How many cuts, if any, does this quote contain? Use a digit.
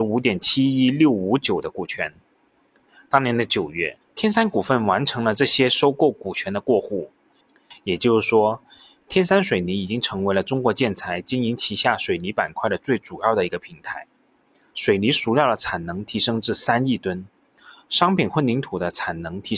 1